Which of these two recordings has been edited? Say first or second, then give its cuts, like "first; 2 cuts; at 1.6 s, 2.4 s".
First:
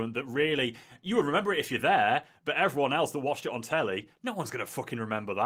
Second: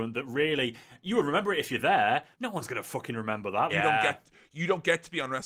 second; 2 cuts; at 2.3 s, 3.7 s